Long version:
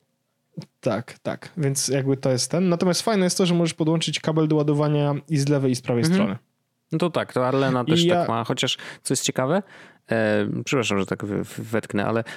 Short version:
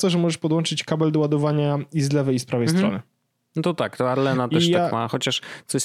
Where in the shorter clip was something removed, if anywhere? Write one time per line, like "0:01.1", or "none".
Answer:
none

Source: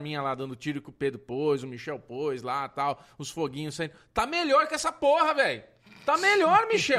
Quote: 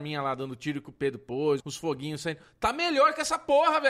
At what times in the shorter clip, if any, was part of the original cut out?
0:01.6

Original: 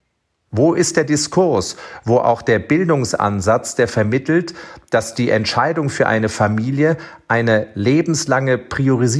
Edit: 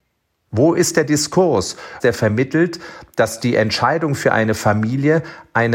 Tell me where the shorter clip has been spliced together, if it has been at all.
0:02.0

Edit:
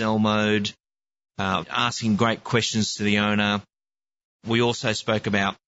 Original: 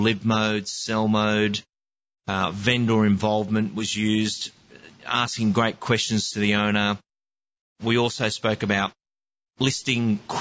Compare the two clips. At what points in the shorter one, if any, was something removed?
0:01.6

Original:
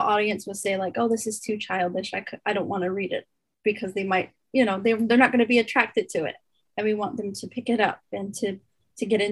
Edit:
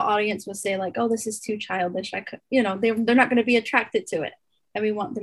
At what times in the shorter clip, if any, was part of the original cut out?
0:02.4

